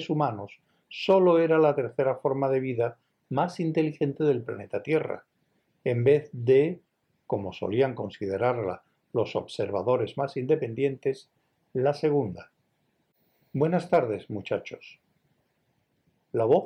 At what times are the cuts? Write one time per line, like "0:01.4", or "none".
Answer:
none